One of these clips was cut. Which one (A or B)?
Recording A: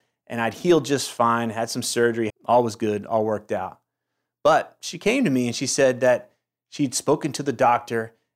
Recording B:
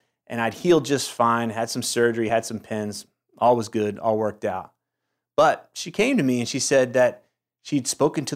A